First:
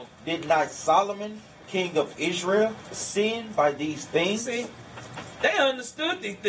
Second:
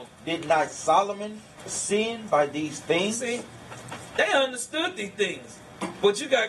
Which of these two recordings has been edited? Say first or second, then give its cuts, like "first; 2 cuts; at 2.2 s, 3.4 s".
second; 1 cut; at 1.6 s